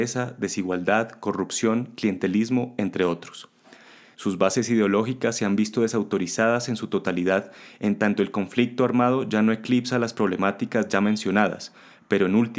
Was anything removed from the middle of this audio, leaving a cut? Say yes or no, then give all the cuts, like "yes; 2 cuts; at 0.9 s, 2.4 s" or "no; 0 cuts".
yes; 1 cut; at 4.1 s